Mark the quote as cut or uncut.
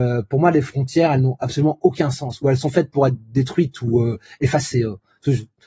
uncut